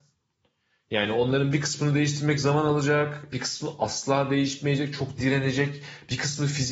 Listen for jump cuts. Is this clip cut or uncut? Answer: uncut